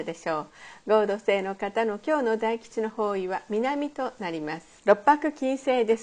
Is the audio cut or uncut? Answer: cut